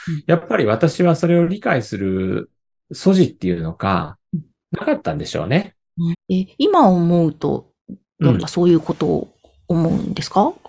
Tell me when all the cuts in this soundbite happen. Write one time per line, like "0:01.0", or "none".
0:06.1
0:08.4